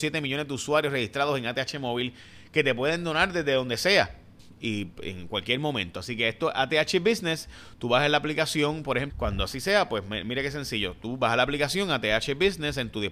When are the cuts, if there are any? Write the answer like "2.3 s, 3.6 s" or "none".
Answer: 9.1 s